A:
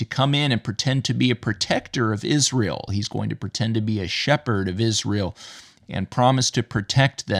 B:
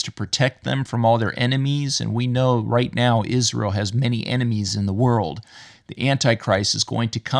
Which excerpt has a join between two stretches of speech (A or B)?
A